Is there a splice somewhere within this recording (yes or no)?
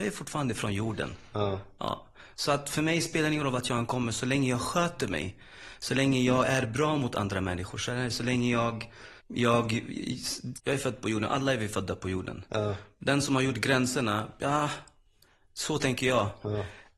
yes